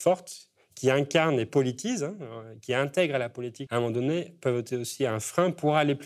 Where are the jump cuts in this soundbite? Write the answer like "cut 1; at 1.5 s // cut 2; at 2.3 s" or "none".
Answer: cut 1; at 3.7 s